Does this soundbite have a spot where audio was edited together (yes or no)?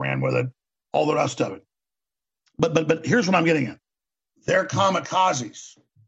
no